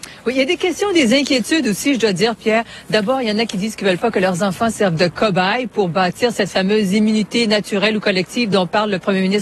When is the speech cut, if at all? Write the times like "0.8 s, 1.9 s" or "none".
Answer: none